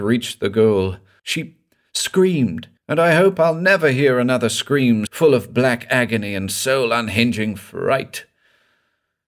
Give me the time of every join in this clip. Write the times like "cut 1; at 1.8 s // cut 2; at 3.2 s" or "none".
cut 1; at 1.2 s // cut 2; at 2.8 s // cut 3; at 5.1 s